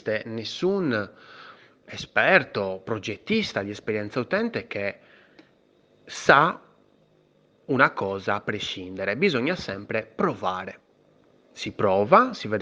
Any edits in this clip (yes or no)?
no